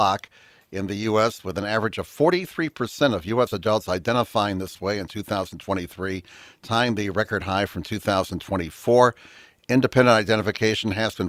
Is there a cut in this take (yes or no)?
no